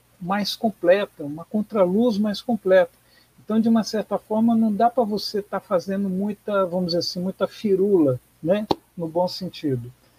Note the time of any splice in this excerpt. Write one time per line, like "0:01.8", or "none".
none